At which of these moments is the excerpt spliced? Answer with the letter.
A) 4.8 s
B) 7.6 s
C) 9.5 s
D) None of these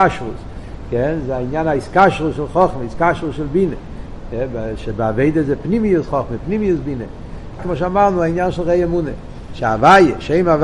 B